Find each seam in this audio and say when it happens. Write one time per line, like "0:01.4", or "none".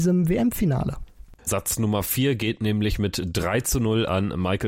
0:01.5

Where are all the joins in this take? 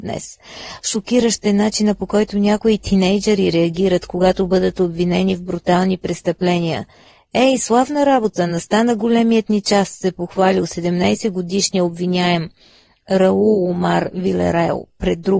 none

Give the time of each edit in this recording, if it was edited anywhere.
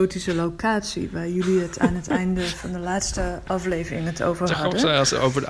none

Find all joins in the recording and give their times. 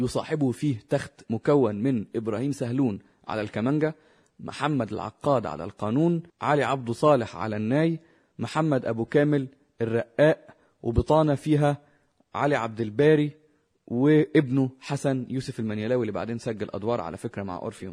0:06.3

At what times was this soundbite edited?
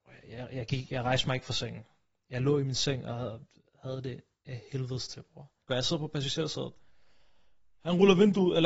0:05.7

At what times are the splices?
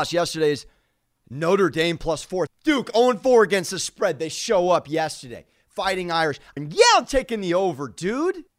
0:02.5
0:06.6

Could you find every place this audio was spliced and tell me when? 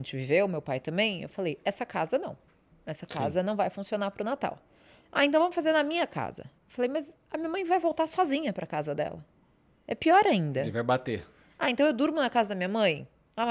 none

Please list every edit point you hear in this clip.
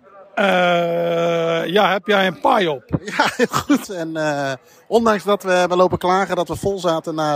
0:03.8

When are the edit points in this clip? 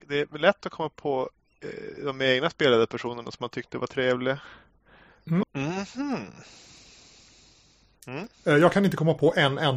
0:05.4

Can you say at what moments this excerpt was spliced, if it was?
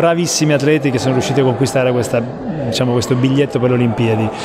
none

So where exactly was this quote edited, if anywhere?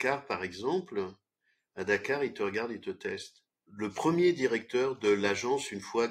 0:03.7

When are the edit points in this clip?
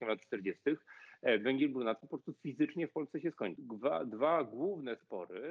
0:03.6

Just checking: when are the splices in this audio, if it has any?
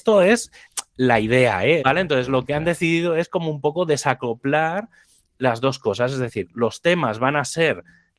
0:01.8

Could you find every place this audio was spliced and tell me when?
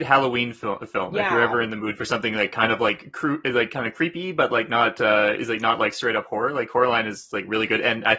none

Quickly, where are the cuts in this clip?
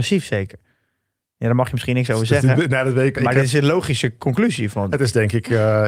0:03.1

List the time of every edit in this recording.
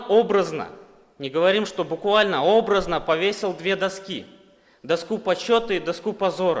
none

